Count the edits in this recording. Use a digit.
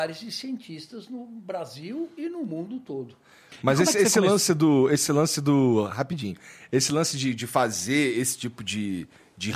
0